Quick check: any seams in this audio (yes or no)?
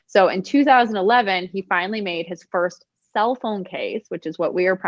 no